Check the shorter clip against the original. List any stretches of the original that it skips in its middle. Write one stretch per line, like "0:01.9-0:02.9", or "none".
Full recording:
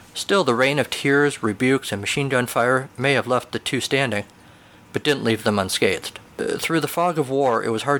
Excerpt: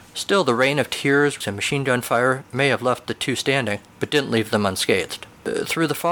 0:01.4-0:01.9
0:04.3-0:04.8